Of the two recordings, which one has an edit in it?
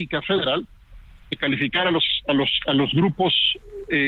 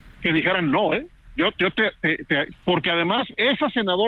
second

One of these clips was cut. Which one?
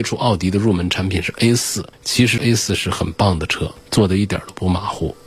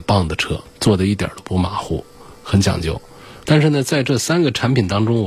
second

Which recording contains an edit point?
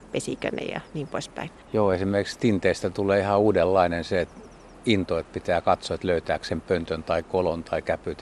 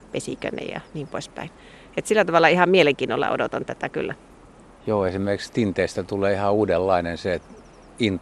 first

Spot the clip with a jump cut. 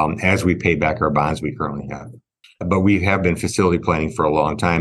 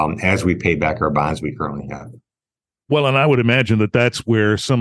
first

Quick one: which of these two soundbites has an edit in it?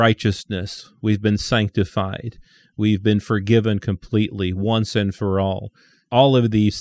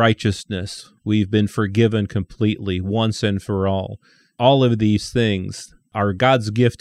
second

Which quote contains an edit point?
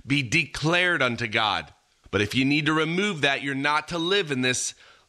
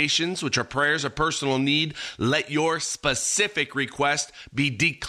first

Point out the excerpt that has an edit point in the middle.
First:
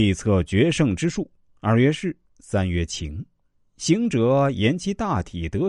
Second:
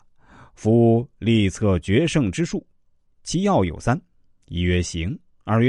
first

